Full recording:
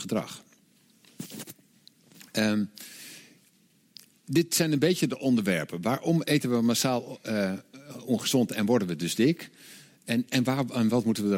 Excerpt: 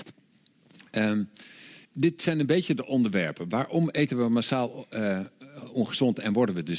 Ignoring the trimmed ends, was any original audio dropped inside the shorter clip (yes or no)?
yes